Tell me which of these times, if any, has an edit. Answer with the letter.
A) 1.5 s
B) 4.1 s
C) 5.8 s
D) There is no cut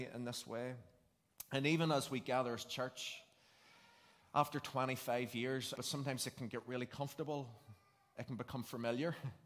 C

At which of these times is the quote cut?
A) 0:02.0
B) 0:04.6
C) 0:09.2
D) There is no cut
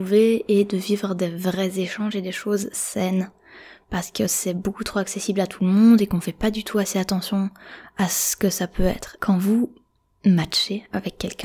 C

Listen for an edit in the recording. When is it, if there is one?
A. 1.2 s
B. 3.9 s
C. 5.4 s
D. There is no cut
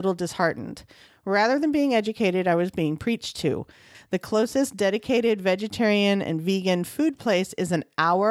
B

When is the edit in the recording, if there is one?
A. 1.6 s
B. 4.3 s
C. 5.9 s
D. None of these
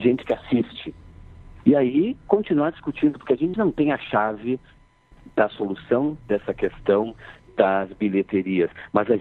A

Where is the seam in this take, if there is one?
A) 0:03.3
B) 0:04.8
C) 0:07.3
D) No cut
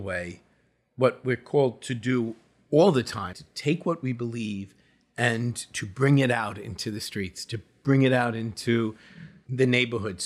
A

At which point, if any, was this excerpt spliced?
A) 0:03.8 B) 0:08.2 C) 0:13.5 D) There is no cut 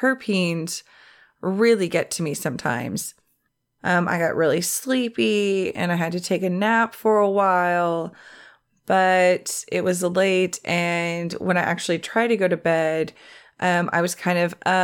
A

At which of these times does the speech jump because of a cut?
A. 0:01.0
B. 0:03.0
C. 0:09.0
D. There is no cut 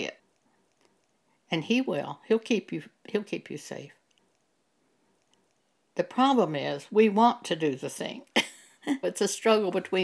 C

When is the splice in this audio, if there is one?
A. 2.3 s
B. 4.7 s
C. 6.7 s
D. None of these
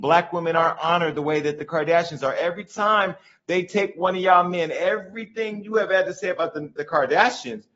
D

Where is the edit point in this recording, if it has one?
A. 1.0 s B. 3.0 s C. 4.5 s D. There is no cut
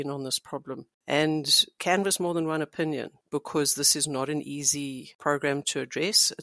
D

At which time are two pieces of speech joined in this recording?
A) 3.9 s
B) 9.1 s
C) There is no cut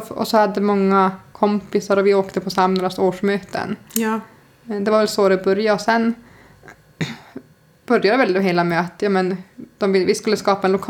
C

